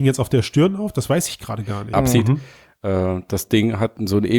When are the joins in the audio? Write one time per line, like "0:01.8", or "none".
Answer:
0:01.9